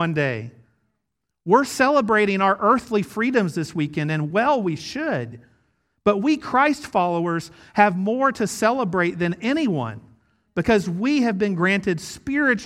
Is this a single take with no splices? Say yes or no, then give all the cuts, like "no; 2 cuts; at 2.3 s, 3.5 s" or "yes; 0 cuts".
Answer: yes; 0 cuts